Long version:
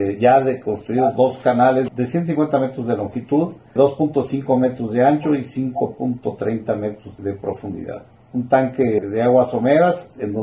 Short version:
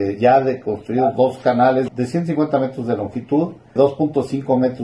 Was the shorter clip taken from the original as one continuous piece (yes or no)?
yes